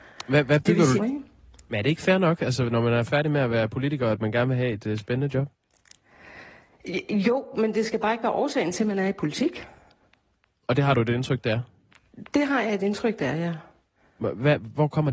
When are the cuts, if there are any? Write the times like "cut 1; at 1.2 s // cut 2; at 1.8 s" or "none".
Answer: cut 1; at 1.0 s